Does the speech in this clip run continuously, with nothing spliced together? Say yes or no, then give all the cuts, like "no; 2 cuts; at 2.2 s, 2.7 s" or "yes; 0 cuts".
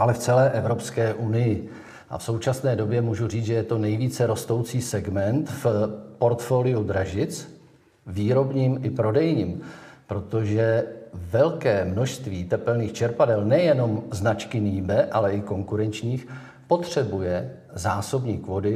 no; 1 cut; at 2.0 s